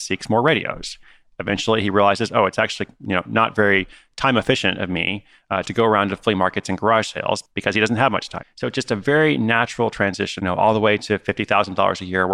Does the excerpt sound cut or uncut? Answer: cut